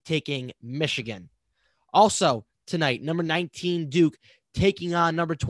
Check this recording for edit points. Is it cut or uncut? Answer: uncut